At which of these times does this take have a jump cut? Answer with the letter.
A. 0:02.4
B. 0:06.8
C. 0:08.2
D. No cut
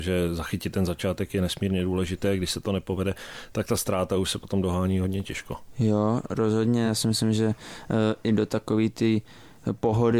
D